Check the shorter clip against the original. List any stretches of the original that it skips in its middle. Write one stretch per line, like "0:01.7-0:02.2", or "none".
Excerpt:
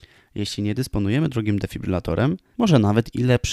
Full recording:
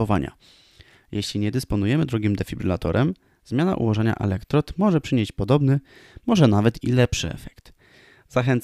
0:03.3-0:06.2